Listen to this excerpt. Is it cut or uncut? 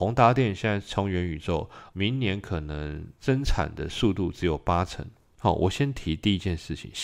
cut